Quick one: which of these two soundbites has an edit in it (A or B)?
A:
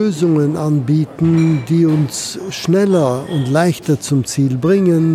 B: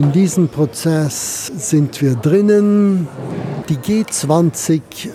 B